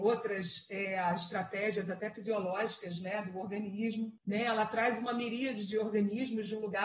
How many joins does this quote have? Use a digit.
1